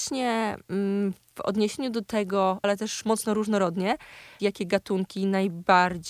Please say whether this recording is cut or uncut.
cut